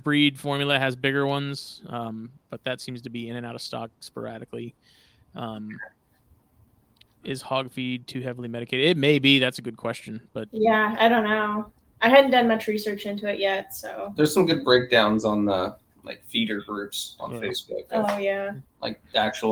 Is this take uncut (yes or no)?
yes